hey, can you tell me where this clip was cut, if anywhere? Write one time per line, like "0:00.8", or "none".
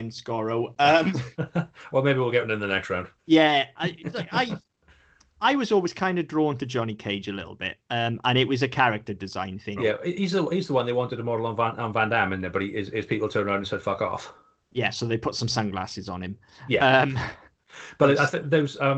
0:03.2
0:09.8